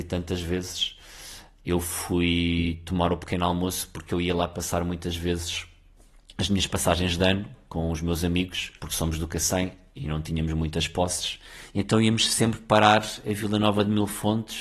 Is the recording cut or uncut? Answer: cut